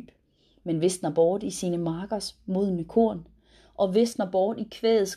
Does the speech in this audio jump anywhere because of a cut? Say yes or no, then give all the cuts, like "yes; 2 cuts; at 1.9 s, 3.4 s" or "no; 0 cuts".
no; 0 cuts